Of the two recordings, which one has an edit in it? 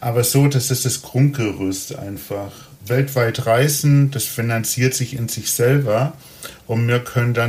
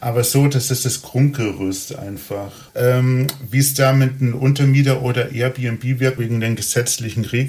second; 2 cuts; at 2.7 s, 6.2 s

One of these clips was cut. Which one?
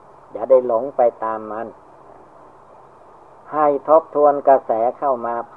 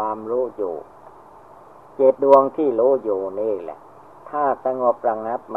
second; 1 cut; at 2.1 s

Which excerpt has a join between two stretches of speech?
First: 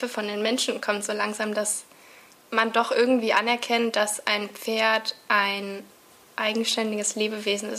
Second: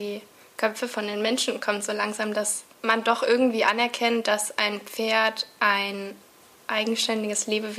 second; 1 cut; at 2.7 s

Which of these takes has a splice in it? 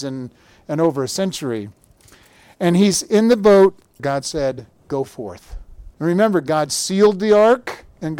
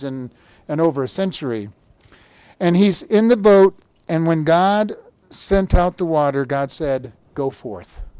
first; 2 cuts; at 4.0 s, 5.9 s

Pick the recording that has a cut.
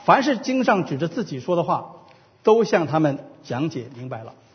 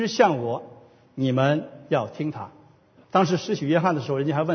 second; 1 cut; at 3.0 s

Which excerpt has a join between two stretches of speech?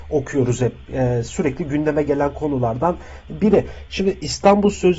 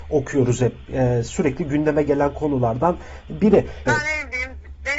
second; 1 cut; at 3.9 s

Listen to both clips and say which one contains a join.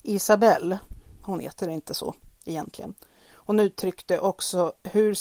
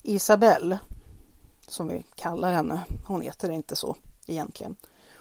first; 1 cut; at 1.2 s

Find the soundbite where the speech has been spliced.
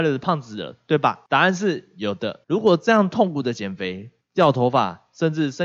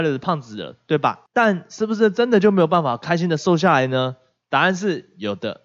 first; 3 cuts; at 1.3 s, 2.4 s, 4.2 s

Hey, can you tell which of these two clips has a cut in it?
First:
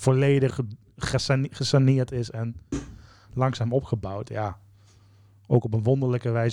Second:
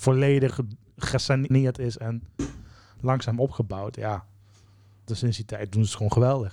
second; 2 cuts; at 1.5 s, 5.1 s

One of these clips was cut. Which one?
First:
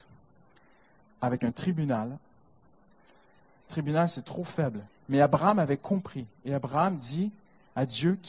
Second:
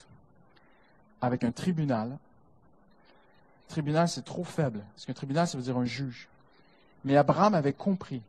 first; 1 cut; at 4.9 s

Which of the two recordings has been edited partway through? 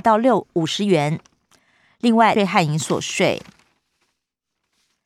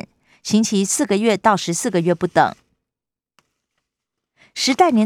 first; 1 cut; at 2.4 s

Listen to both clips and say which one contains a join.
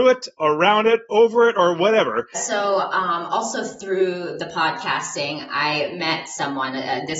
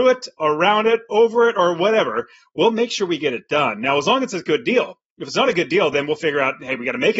first; 1 cut; at 2.3 s

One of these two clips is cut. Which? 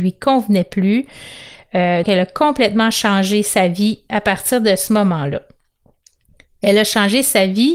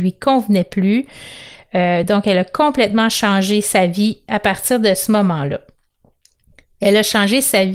first; 1 cut; at 2.0 s

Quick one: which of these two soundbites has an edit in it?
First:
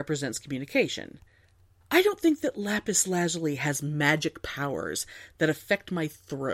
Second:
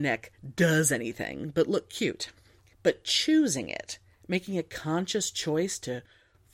first; 1 cut; at 1.8 s

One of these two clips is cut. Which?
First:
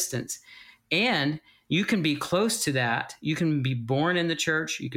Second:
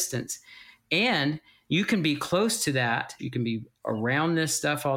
second; 1 cut; at 3.2 s

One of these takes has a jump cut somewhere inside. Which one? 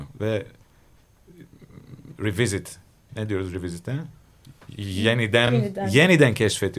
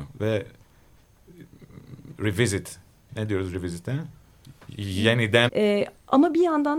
second; 1 cut; at 5.5 s

